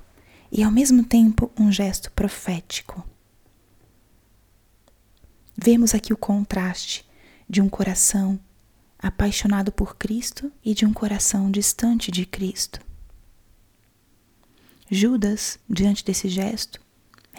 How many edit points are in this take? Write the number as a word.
two